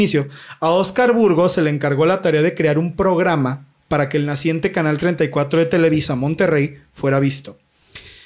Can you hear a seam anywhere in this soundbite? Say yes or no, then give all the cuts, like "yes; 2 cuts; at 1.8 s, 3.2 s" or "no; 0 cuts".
no; 0 cuts